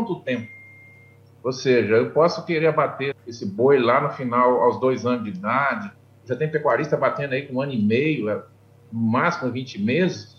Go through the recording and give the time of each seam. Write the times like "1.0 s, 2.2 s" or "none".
3.1 s